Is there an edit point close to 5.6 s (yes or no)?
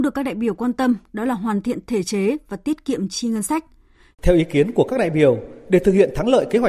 no